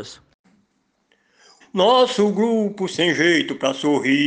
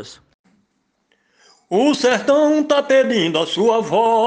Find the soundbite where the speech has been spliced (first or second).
first